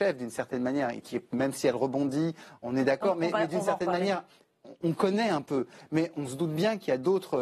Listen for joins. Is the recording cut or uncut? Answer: uncut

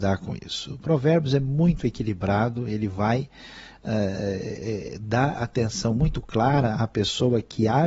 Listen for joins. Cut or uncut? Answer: uncut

